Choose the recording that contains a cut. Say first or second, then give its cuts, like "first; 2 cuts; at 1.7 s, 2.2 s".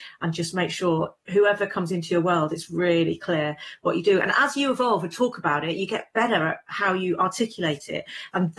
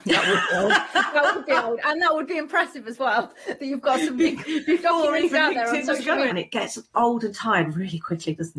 second; 1 cut; at 6.3 s